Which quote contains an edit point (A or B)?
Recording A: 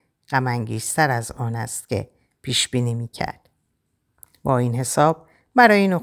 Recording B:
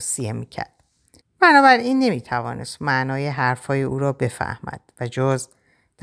B